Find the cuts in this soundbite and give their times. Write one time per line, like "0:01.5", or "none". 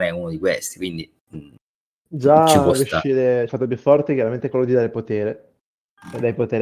0:03.5

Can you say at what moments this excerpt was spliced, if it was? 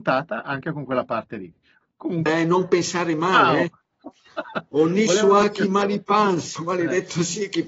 0:02.3
0:06.6

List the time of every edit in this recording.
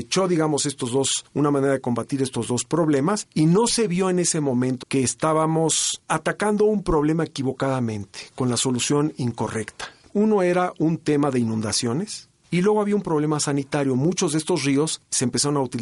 0:04.8
0:10.1

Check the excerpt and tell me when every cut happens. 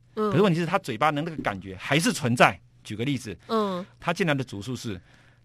0:02.8
0:04.0

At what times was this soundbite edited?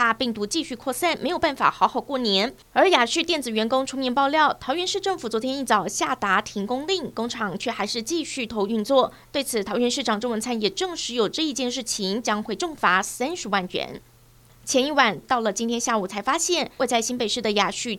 0:08.5
0:15.2
0:16.8

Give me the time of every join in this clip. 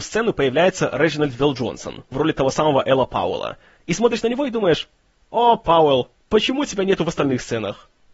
none

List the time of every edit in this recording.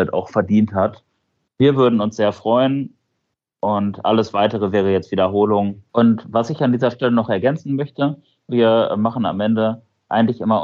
0:05.9
0:08.5

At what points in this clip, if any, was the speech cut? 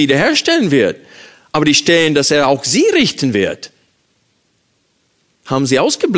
none

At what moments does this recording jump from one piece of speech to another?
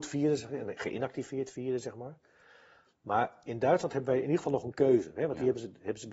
none

